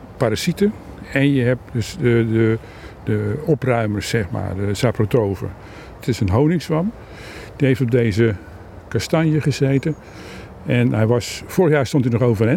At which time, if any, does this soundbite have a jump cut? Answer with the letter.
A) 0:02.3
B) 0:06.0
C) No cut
B